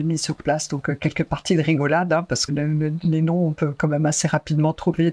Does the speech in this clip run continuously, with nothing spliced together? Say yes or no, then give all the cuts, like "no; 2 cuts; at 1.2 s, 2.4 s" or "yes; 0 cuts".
no; 1 cut; at 2.5 s